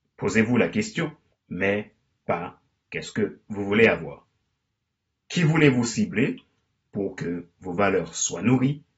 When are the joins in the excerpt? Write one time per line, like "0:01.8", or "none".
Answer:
0:01.3
0:05.2